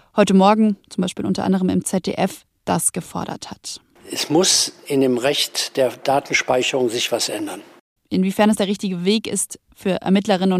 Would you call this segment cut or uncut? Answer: uncut